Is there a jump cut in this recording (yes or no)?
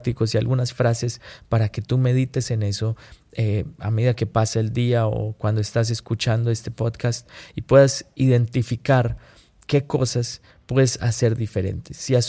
no